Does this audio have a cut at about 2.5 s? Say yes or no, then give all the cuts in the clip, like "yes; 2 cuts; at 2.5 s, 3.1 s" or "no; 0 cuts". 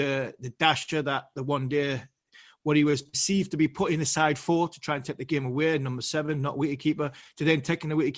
no; 0 cuts